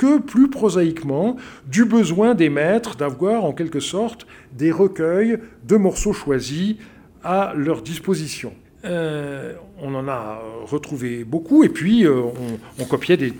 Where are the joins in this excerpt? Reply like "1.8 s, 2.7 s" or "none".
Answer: 8.6 s